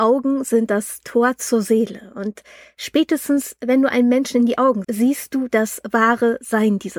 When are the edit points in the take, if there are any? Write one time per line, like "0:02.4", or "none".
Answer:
0:04.8